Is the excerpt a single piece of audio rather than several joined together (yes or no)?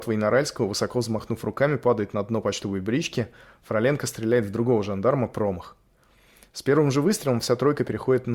yes